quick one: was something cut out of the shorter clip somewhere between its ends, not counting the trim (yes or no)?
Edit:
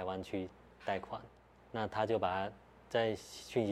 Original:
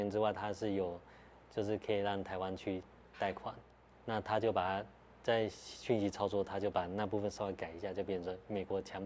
no